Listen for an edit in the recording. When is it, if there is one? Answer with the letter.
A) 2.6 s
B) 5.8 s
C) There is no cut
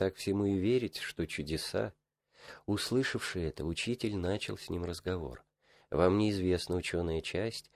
B